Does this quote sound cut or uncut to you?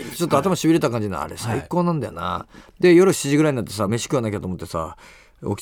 uncut